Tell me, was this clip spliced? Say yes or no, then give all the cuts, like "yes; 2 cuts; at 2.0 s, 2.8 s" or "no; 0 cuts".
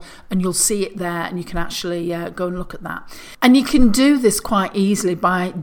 yes; 1 cut; at 3.3 s